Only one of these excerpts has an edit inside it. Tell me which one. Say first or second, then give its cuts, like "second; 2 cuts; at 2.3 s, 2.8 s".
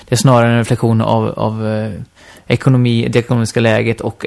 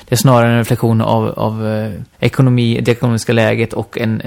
second; 1 cut; at 2.1 s